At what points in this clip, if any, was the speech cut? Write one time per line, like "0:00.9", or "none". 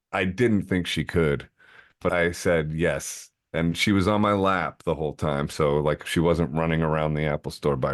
0:02.1